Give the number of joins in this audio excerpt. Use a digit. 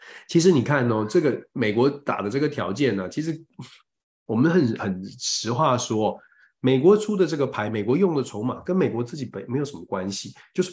0